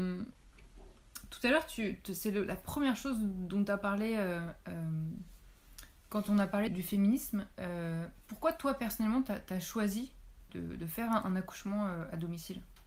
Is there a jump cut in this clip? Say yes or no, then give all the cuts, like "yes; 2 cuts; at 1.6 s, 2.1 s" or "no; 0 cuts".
yes; 2 cuts; at 6.7 s, 10.5 s